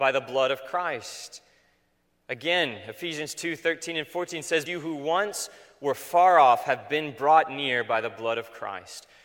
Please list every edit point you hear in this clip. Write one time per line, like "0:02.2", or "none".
0:04.7